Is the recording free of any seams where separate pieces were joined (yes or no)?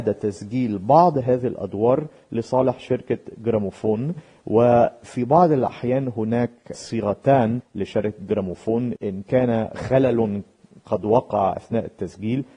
yes